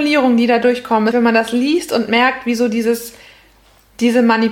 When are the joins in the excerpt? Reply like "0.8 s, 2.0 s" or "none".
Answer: 1.1 s